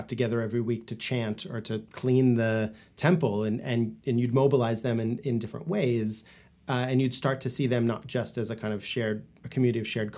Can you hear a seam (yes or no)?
no